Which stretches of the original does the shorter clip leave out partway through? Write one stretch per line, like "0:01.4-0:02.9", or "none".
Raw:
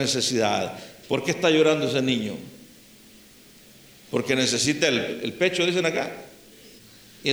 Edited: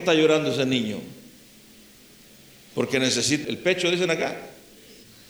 0:04.8-0:05.2